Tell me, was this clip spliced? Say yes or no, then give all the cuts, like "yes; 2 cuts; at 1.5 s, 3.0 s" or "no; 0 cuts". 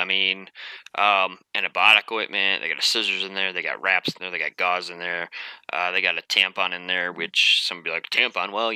no; 0 cuts